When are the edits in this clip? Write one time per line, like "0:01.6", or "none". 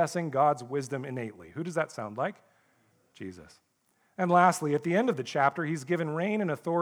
none